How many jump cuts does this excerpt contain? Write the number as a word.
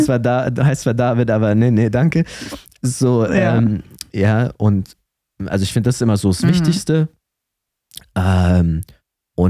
zero